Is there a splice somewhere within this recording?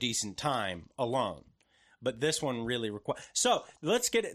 no; 0 cuts

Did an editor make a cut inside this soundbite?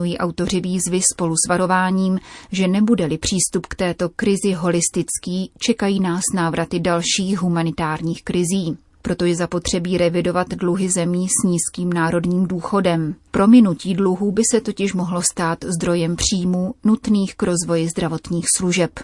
no; 0 cuts

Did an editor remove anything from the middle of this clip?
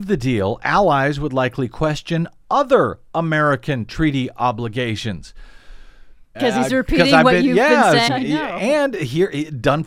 yes; 2 cuts; at 6.3 s, 8.1 s

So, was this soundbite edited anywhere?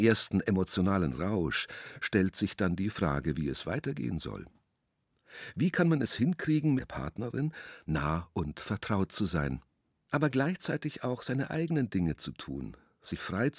yes; 1 cut; at 6.8 s

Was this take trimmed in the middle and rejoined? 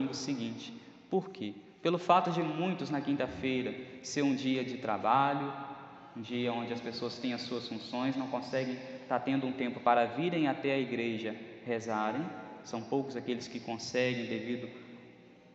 no; 0 cuts

